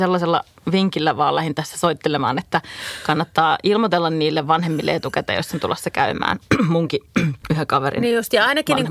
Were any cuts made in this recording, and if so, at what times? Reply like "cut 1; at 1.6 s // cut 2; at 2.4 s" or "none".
cut 1; at 7.4 s